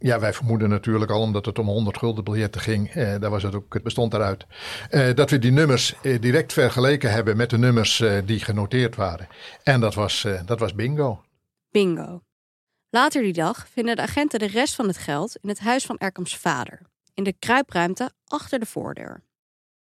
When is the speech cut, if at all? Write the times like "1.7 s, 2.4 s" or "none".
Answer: 3.8 s